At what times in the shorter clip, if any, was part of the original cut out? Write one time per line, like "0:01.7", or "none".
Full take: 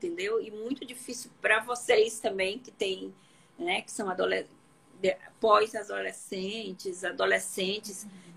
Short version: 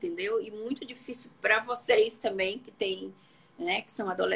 none